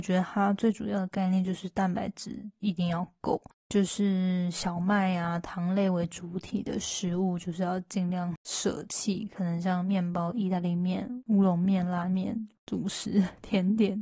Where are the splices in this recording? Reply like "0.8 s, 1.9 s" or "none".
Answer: none